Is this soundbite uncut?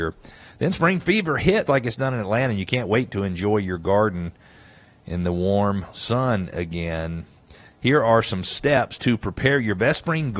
no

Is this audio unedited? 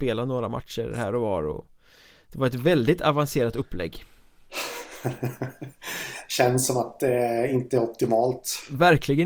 yes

